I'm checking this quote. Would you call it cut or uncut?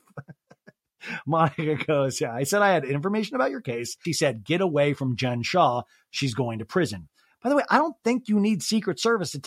cut